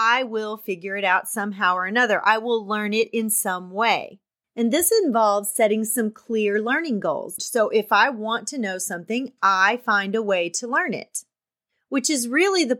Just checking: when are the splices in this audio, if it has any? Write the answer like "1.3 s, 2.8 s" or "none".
4.4 s, 7.4 s